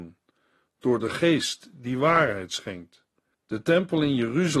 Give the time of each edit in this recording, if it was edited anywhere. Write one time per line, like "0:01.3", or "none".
0:03.3